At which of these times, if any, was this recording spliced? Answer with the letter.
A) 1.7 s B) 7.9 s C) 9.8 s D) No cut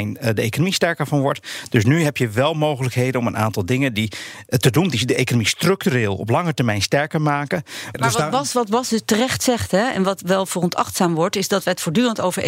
B